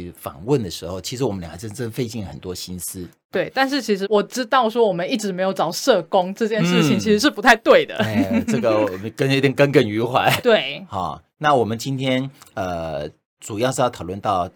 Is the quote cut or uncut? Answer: cut